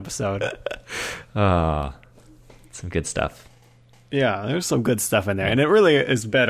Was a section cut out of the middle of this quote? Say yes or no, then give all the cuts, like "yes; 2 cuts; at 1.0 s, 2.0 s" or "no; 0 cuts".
no; 0 cuts